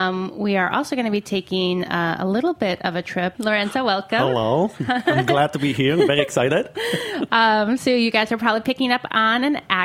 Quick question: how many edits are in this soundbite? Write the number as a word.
one